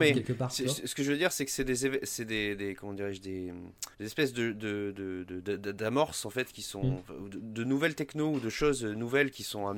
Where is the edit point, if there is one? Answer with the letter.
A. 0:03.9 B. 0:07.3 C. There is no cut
A